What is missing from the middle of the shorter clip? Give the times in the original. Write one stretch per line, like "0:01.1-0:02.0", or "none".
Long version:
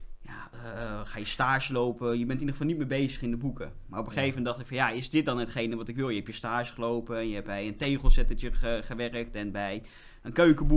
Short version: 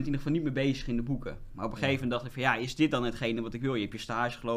none